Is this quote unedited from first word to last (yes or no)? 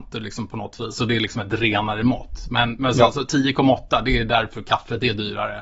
yes